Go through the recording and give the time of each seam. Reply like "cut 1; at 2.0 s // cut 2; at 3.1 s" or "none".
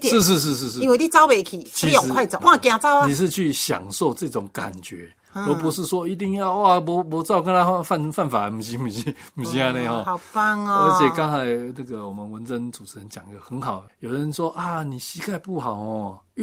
cut 1; at 2.4 s // cut 2; at 13.9 s